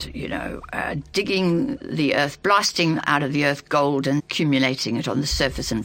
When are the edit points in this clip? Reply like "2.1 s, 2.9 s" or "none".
4.2 s